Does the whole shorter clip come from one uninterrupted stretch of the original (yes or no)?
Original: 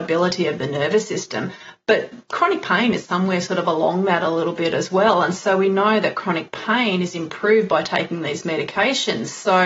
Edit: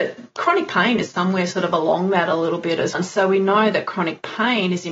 no